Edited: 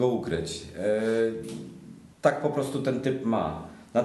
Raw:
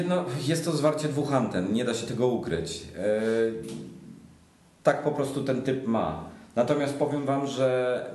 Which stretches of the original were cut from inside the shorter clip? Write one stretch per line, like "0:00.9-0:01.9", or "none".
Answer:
0:04.3-0:04.7